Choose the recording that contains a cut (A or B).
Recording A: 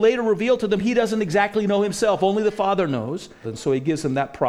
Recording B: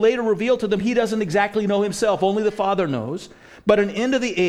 A